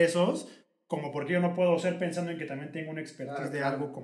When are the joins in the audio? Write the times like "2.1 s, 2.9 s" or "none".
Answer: none